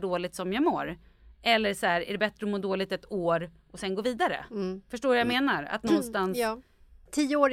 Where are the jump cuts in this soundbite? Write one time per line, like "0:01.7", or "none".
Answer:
none